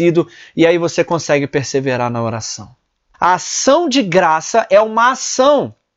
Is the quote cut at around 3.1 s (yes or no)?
yes